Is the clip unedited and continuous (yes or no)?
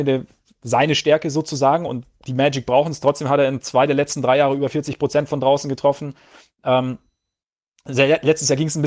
yes